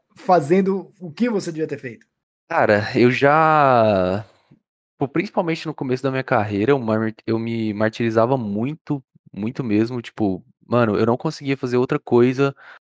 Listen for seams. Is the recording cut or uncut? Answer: uncut